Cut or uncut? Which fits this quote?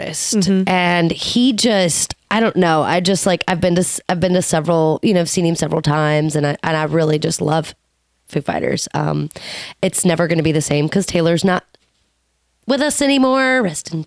uncut